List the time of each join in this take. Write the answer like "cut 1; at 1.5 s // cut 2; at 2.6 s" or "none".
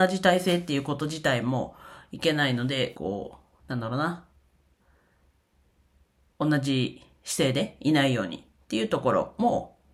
cut 1; at 2.9 s